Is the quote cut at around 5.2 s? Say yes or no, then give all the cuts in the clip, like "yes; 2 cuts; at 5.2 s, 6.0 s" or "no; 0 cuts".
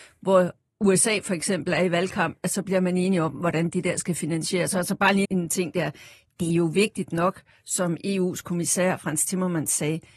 yes; 1 cut; at 5.2 s